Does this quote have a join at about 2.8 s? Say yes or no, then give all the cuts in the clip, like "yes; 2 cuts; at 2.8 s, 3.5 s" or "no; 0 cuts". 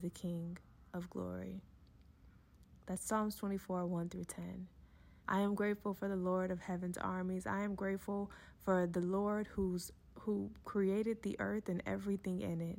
no; 1 cut; at 5.2 s